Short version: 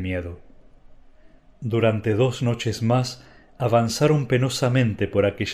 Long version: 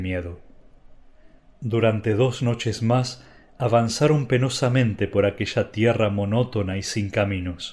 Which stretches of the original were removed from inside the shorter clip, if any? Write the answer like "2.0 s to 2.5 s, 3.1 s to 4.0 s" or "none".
none